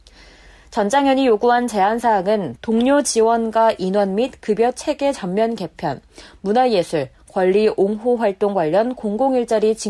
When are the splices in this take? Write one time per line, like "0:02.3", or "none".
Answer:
none